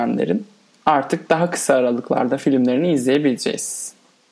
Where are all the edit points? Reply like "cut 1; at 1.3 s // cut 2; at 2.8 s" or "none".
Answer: none